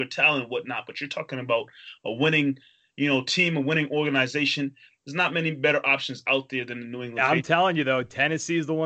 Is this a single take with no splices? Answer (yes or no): yes